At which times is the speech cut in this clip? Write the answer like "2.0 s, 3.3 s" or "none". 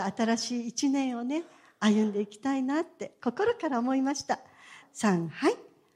4.8 s

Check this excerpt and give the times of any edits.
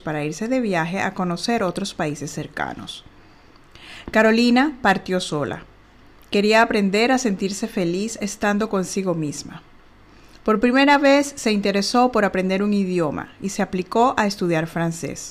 none

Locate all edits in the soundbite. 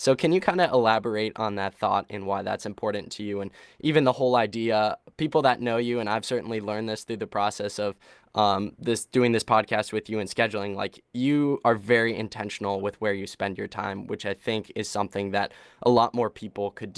none

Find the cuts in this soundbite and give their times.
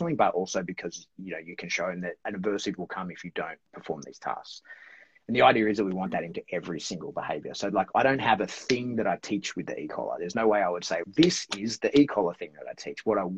11.0 s

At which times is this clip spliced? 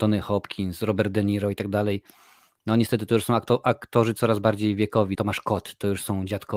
5.1 s

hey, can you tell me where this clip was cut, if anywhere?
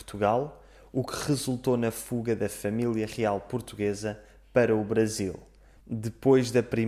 5.8 s

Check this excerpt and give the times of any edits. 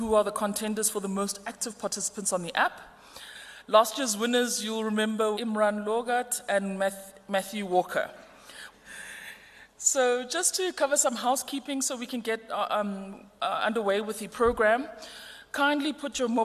5.3 s, 8.7 s

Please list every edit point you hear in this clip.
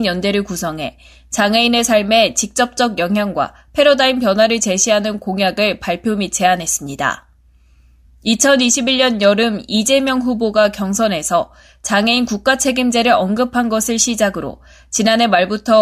none

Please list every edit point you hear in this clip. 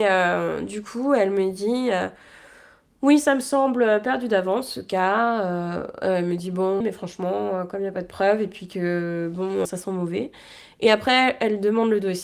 6.8 s, 9.7 s

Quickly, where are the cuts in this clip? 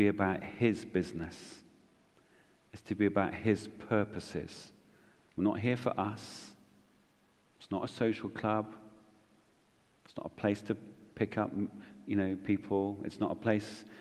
none

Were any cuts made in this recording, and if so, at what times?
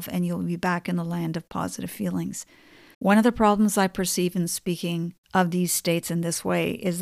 2.9 s, 5.2 s

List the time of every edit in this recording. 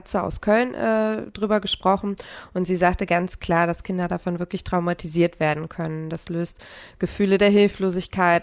none

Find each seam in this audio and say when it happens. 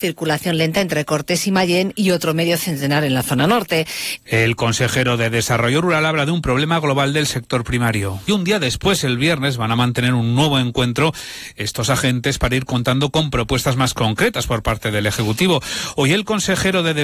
4.2 s, 8.3 s

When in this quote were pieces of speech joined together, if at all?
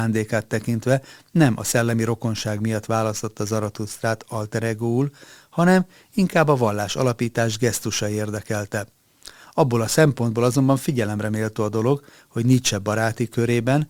none

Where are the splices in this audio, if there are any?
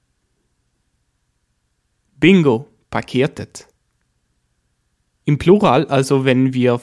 none

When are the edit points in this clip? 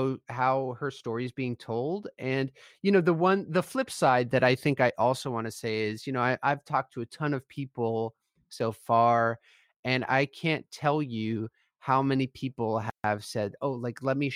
none

